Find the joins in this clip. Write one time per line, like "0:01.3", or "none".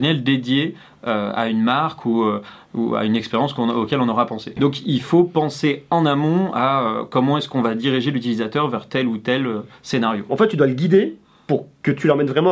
0:04.6
0:10.3